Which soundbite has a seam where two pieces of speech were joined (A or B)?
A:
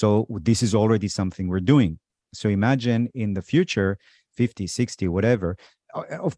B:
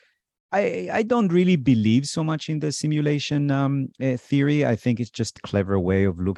B